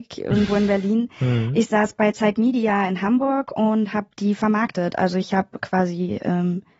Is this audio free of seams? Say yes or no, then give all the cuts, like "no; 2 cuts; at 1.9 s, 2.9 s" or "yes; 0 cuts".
yes; 0 cuts